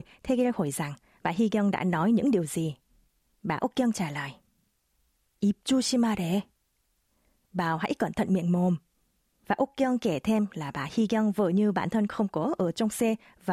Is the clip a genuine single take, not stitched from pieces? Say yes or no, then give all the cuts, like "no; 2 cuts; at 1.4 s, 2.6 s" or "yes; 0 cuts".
yes; 0 cuts